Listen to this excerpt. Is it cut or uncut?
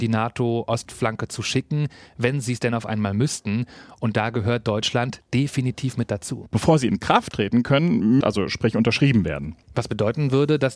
cut